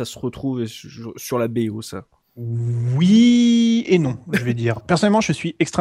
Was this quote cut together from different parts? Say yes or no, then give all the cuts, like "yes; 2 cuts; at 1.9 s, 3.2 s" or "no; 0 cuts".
yes; 1 cut; at 4.8 s